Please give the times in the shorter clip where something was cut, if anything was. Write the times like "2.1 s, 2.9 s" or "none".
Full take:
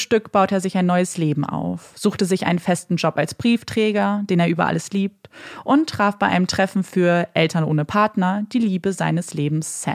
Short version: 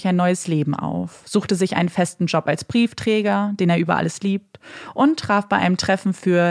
none